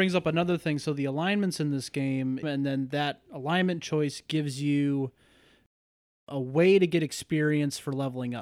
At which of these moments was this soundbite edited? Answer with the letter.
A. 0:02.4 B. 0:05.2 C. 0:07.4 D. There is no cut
A